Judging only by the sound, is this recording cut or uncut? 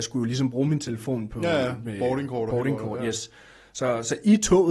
uncut